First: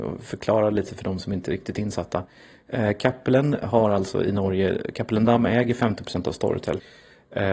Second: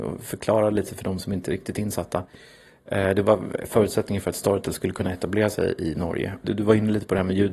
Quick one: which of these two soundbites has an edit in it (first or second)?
second